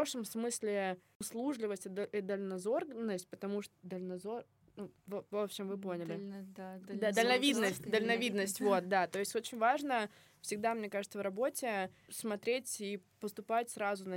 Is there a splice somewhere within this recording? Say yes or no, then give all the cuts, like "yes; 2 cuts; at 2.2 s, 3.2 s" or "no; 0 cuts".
no; 0 cuts